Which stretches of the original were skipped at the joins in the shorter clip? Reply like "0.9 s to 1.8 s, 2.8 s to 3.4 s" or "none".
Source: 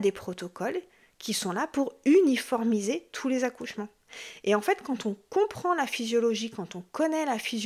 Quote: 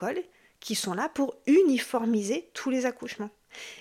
none